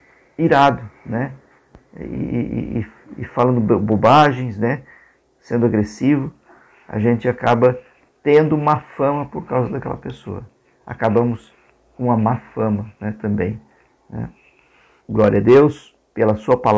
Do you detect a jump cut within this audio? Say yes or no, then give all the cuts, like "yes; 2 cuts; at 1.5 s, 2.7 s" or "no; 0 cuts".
yes; 1 cut; at 15.0 s